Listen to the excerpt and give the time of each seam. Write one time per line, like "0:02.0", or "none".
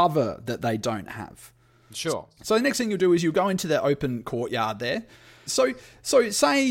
0:02.4
0:05.5